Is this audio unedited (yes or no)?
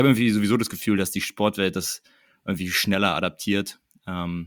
yes